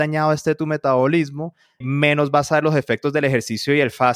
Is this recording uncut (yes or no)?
no